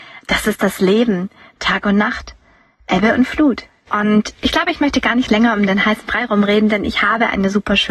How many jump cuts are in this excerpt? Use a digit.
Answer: 1